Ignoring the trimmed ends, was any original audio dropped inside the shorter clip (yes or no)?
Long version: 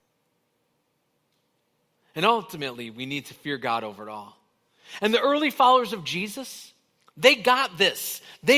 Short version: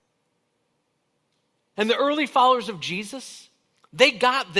yes